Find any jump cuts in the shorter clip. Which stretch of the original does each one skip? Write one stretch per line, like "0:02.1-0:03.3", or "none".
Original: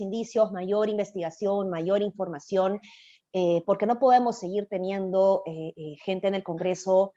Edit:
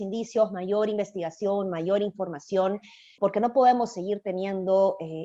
0:03.2-0:03.6